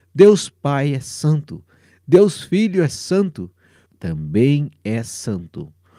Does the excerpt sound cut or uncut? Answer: cut